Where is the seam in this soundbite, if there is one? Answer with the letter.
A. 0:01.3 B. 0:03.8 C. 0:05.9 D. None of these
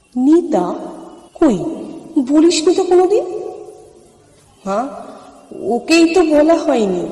A